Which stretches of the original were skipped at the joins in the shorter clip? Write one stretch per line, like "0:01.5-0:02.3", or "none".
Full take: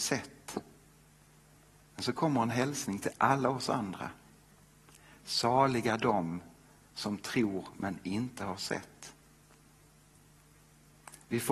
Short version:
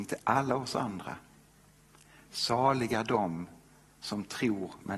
none